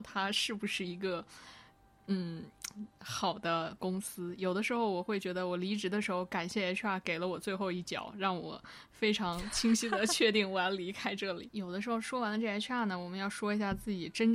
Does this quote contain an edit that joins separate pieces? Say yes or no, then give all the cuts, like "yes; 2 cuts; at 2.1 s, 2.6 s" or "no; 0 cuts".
no; 0 cuts